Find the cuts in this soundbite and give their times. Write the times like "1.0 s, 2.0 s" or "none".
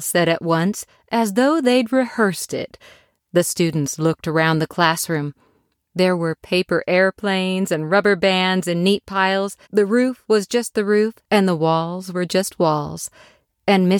9.6 s, 11.2 s